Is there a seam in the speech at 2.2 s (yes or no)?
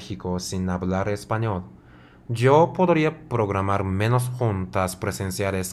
yes